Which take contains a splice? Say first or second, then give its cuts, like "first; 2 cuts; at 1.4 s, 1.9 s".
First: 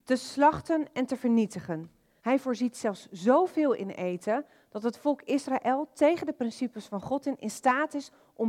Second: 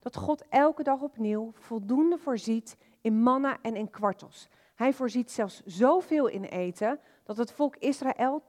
first; 1 cut; at 2.2 s